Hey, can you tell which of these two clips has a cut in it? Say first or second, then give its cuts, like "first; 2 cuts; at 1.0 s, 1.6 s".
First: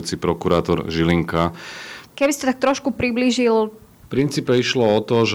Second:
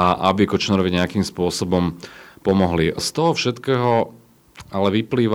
first; 2 cuts; at 2.1 s, 4.0 s